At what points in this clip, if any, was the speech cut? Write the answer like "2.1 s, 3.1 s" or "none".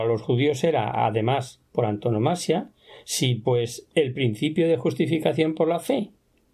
1.7 s